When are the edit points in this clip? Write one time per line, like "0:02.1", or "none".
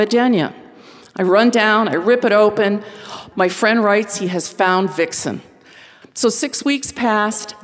0:03.3
0:06.0